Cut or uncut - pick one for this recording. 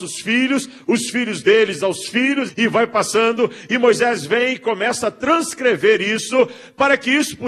cut